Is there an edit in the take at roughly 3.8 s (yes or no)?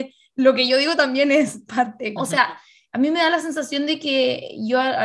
no